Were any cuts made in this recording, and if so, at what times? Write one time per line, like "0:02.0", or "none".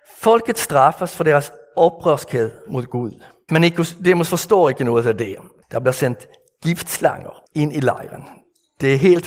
0:03.5
0:05.6
0:07.5